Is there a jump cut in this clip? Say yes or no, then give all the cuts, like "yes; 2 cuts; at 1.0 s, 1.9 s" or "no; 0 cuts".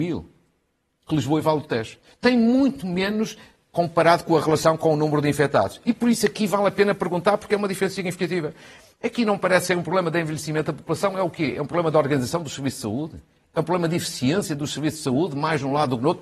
no; 0 cuts